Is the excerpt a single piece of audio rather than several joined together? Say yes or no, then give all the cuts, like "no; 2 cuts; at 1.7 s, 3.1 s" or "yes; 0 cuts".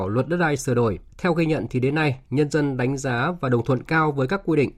no; 1 cut; at 1.1 s